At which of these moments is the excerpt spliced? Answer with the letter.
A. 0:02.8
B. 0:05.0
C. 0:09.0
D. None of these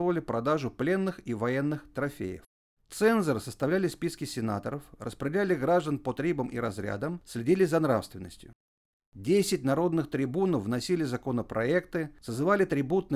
A